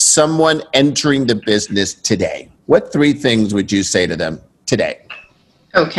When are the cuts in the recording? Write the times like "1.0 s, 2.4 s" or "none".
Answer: 2.6 s